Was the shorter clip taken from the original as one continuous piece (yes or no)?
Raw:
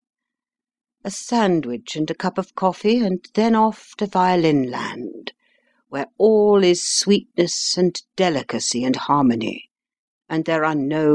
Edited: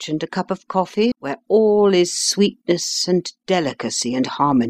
no